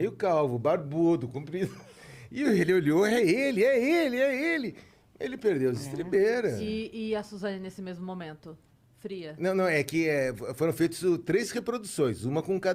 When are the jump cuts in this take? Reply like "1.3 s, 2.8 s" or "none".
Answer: none